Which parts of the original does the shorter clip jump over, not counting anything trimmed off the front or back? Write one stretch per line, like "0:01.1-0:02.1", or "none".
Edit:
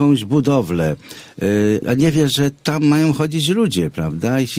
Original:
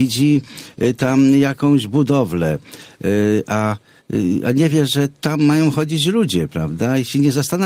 0:03.4-0:04.4